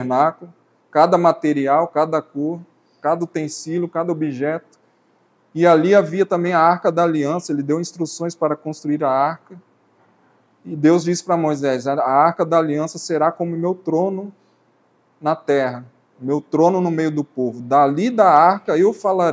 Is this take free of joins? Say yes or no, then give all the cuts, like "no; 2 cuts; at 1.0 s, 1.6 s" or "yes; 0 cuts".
yes; 0 cuts